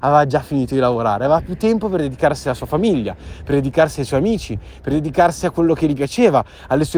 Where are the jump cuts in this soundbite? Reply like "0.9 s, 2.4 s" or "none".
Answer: none

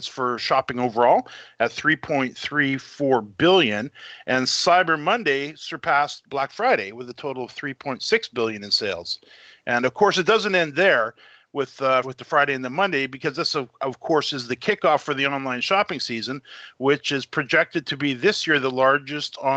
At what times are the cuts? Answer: 12.0 s

